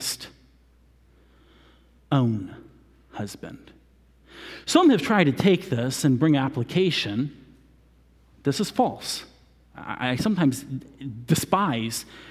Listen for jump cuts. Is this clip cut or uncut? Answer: cut